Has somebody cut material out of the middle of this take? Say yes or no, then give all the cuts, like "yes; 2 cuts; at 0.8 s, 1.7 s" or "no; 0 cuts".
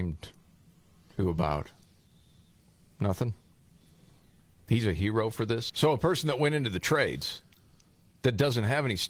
yes; 1 cut; at 5.7 s